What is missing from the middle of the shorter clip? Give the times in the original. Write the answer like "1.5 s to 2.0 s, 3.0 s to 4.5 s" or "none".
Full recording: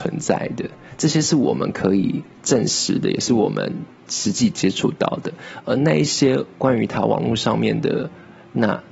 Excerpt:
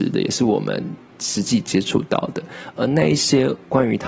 none